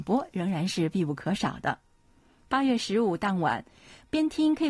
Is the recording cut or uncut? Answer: uncut